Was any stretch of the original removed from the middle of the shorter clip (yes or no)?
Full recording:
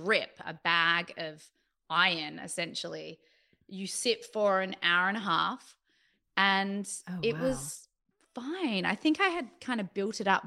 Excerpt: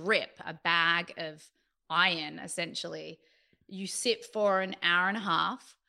no